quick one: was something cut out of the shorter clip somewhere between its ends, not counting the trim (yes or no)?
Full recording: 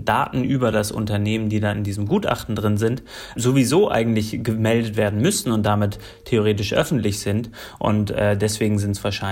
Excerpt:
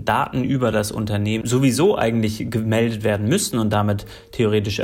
yes